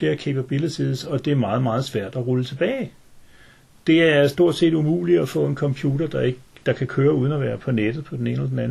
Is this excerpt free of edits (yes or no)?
yes